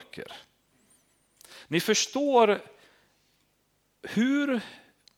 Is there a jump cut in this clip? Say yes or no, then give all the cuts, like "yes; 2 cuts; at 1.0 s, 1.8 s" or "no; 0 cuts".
no; 0 cuts